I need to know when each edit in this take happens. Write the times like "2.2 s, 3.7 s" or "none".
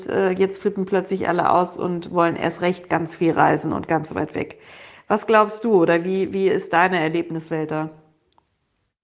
none